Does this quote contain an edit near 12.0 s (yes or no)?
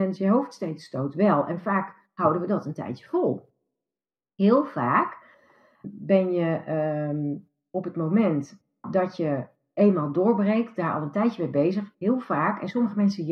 no